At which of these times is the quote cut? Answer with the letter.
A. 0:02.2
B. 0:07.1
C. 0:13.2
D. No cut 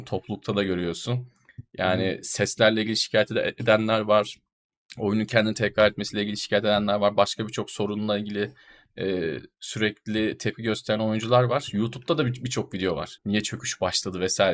C